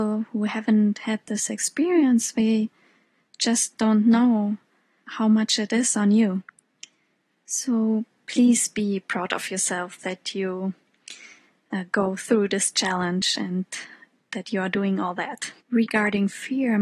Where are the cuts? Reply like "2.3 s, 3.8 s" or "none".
15.6 s